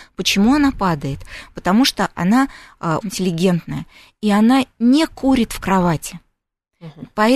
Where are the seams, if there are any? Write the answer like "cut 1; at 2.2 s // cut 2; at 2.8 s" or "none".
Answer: cut 1; at 3.0 s